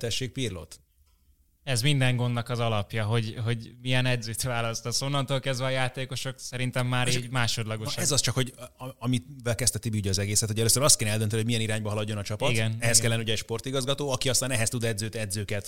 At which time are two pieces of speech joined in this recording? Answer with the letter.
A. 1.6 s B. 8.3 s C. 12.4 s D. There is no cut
D